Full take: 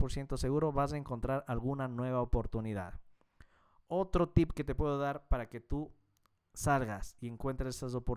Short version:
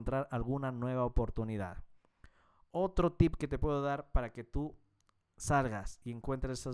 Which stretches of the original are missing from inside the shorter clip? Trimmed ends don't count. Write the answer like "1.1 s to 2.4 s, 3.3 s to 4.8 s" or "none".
none

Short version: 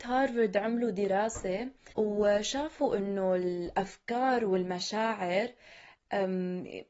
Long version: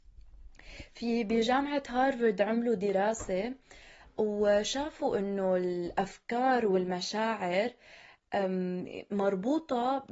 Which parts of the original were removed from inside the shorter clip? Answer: 3.8 s to 4.1 s

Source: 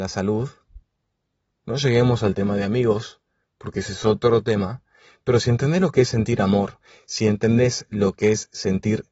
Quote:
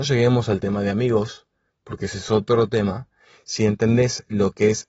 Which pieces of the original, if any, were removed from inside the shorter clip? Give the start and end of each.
5.1 s to 7.0 s

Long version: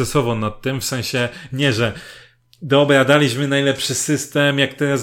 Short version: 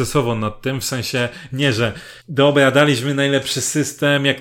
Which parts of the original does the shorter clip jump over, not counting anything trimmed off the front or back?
2.2 s to 2.5 s

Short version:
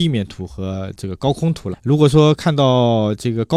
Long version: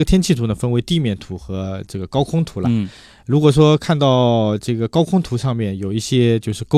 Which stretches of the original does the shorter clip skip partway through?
2.6 s to 3.1 s

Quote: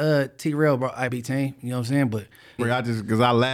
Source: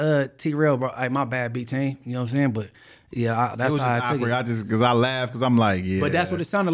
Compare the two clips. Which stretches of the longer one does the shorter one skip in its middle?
1.1 s to 1.5 s, 3.0 s to 4.2 s

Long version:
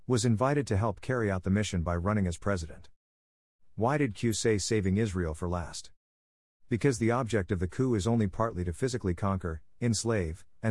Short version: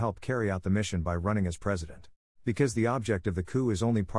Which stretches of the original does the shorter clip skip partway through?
3.1 s to 6.5 s

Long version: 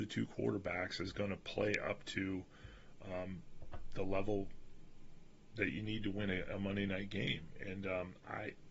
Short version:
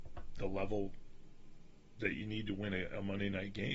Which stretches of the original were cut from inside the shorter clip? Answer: none

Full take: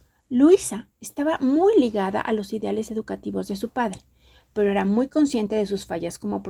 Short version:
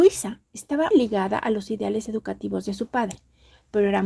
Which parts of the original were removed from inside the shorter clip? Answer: 1.4 s to 1.7 s

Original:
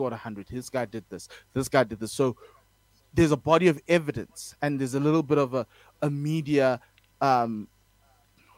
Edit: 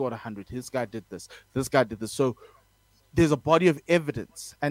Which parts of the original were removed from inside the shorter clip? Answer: none

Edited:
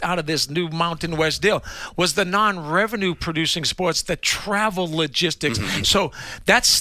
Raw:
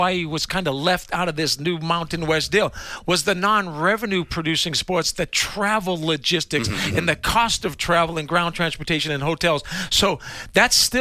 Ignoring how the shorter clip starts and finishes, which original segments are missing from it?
6.9 s to 9.9 s

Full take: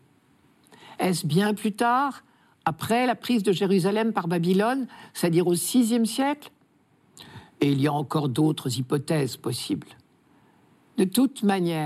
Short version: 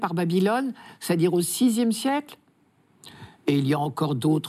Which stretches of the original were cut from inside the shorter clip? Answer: none

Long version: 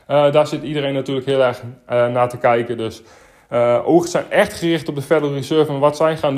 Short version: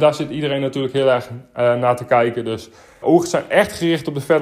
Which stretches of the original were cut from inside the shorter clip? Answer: 3.3 s to 3.8 s

